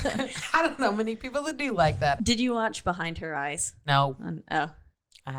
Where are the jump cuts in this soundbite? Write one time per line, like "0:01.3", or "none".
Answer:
0:02.2